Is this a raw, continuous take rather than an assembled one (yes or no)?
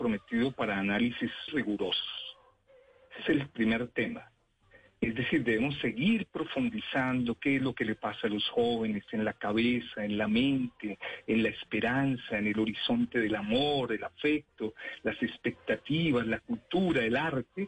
no